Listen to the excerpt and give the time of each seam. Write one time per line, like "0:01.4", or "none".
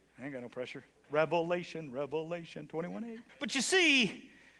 0:01.0
0:03.3